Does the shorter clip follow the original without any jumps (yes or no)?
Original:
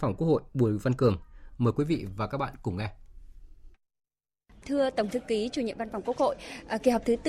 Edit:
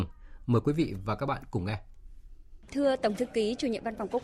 no